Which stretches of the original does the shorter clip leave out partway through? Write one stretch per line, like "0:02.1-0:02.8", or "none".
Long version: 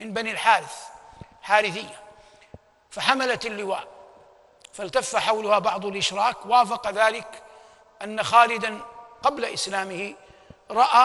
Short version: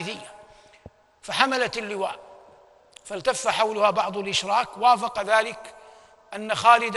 none